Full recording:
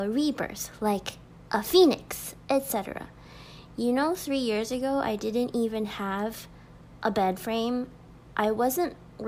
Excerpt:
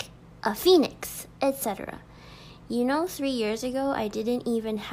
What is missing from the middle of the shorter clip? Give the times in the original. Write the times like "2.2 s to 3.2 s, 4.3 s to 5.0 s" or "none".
none